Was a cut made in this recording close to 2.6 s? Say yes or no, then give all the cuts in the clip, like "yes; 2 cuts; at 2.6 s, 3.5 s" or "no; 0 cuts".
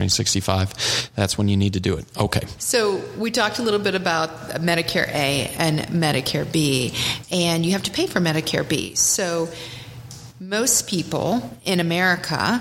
yes; 1 cut; at 2.6 s